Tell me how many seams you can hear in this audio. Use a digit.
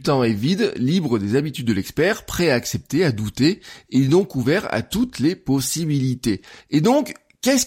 1